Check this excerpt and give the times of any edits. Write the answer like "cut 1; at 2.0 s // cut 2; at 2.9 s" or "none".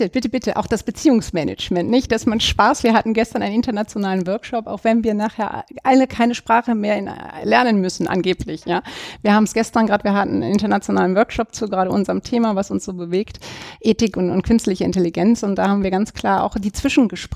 none

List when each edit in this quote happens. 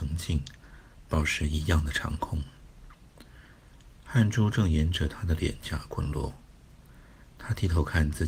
cut 1; at 4.0 s

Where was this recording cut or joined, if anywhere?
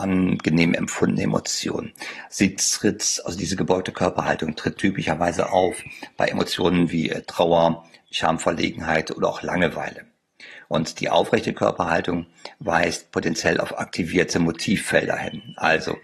none

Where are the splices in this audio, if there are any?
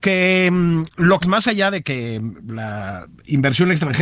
cut 1; at 1.2 s

